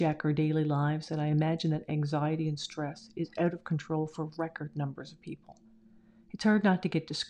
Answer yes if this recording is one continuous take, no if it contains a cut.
yes